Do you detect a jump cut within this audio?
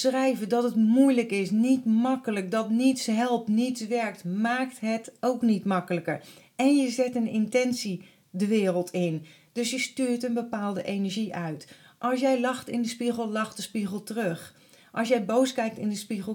no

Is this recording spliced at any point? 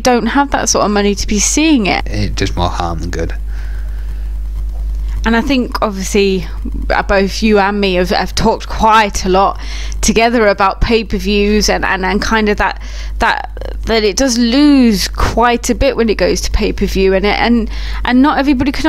yes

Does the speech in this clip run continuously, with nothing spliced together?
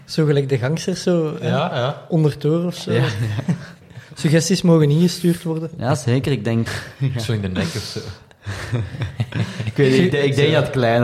no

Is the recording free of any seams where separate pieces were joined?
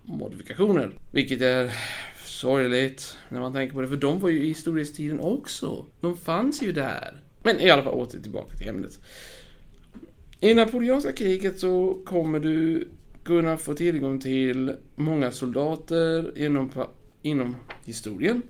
no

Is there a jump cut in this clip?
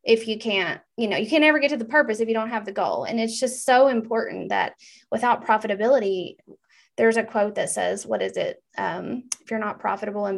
no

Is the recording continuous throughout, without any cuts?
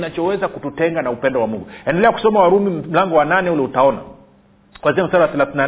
yes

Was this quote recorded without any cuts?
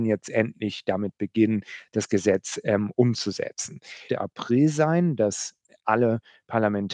no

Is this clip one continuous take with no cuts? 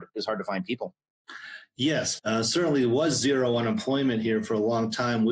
no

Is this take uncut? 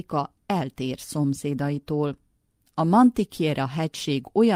yes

